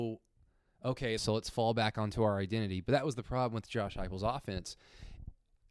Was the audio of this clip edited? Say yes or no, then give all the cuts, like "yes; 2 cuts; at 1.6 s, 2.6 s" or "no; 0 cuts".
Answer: yes; 1 cut; at 1.2 s